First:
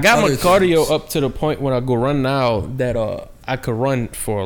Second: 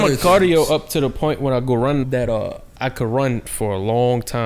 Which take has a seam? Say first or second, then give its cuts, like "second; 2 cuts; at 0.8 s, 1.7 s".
second; 1 cut; at 2.0 s